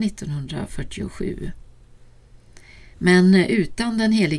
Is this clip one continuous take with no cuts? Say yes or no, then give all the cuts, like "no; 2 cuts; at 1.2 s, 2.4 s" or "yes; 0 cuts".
no; 1 cut; at 2.9 s